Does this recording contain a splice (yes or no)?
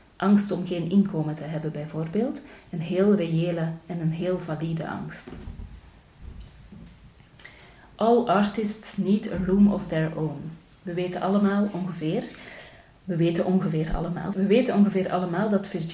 yes